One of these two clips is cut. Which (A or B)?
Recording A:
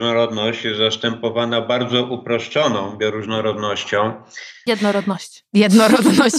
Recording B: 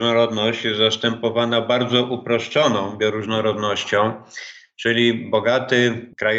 A